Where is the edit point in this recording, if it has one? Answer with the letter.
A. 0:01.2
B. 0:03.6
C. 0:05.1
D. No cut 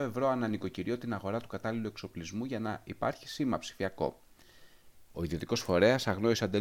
C